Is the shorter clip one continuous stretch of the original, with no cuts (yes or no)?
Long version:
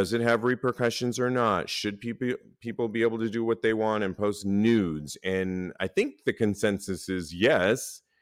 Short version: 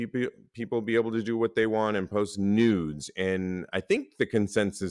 yes